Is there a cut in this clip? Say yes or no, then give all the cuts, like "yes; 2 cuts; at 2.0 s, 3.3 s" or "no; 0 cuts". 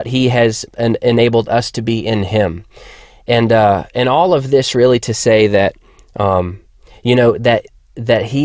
no; 0 cuts